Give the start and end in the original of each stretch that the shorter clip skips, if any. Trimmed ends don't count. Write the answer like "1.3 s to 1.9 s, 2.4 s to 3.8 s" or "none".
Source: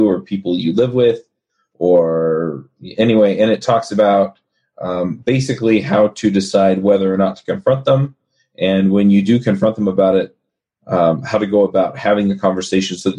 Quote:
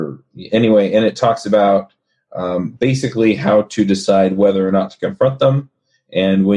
none